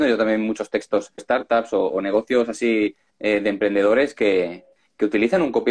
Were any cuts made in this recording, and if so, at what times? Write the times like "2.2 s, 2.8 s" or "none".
1.2 s